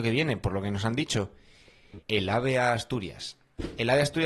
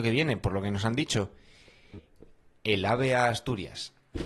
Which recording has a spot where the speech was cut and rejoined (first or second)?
first